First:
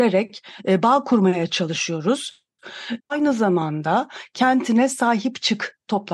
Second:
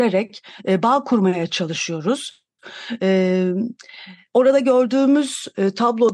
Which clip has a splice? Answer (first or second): first